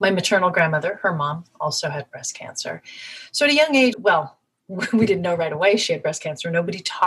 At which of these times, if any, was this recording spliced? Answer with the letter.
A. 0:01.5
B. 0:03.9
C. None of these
B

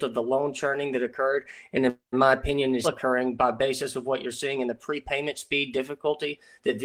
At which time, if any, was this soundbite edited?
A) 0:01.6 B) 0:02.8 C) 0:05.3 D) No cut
B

